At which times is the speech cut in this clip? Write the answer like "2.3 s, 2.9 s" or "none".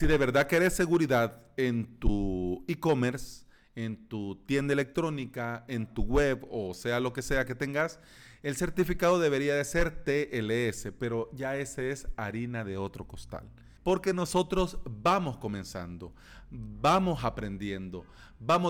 13.8 s

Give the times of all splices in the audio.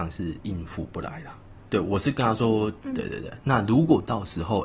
1.7 s, 2.8 s

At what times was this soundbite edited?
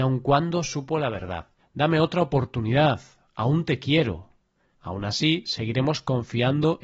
1.6 s, 4.7 s

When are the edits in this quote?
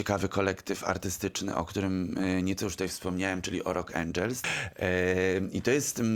4.4 s

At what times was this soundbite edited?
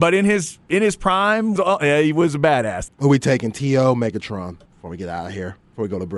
1.6 s, 2.9 s, 4.7 s

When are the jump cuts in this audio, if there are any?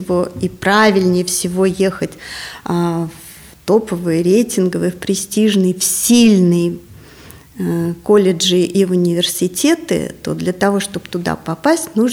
none

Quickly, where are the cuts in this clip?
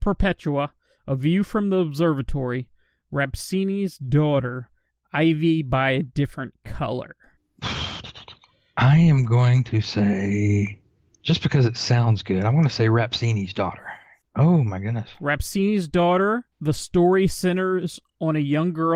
14.2 s, 16.5 s

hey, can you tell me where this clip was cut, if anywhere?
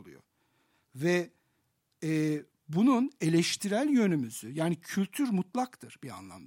none

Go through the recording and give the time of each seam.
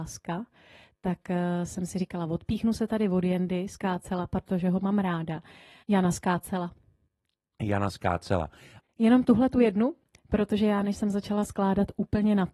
5.8 s, 8.8 s

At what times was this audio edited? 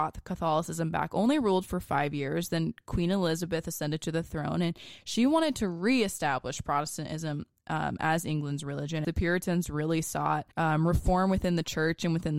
9.0 s, 10.5 s

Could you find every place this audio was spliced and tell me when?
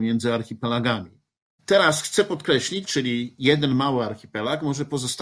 1.6 s, 2.8 s

